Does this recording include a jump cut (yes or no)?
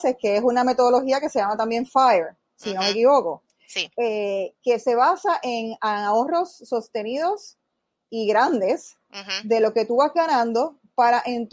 no